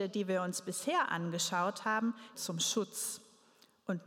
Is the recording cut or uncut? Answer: cut